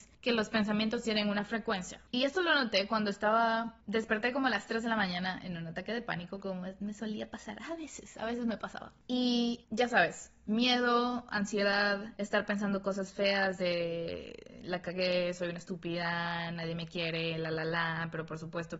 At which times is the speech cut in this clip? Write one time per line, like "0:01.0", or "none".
none